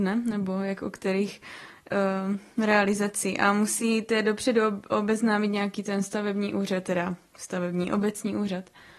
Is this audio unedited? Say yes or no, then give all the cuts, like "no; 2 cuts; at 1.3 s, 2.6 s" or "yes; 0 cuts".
yes; 0 cuts